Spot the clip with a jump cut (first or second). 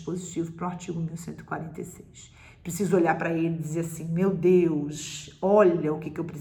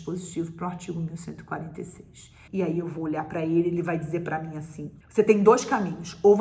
second